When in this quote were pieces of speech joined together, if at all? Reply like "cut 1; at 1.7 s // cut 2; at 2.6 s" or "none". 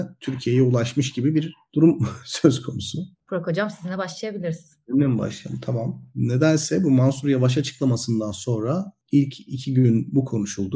cut 1; at 3.1 s // cut 2; at 6.1 s